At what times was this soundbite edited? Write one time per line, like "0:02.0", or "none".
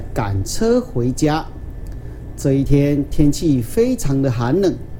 none